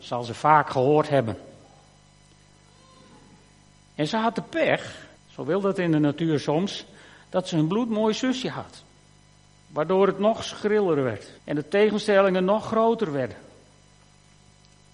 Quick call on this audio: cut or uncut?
cut